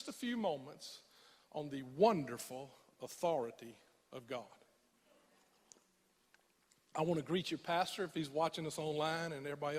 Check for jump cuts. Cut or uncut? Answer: uncut